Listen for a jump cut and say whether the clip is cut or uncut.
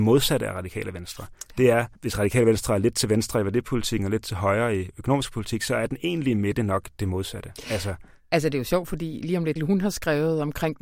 cut